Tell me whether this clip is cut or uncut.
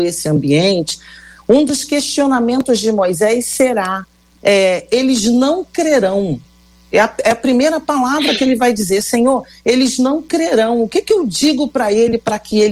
uncut